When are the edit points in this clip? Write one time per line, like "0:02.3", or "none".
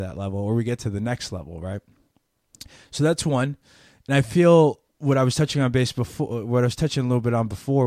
0:04.9